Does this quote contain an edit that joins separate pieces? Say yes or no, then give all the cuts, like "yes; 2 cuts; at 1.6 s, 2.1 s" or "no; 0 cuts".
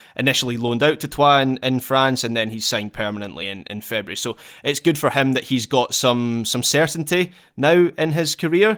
no; 0 cuts